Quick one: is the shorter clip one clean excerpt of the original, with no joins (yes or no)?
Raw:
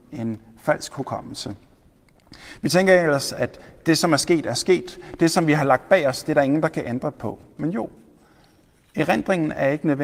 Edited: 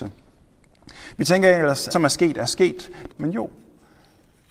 no